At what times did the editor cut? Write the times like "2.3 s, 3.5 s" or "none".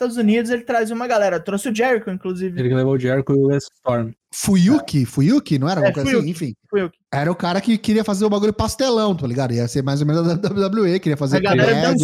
none